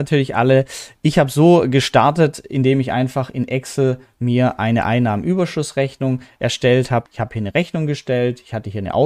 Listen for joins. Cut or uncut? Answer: cut